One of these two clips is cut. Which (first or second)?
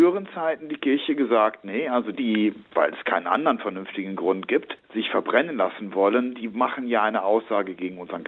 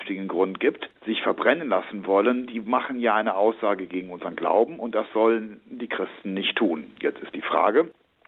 first